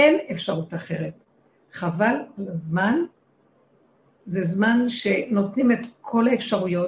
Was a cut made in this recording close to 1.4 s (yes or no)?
no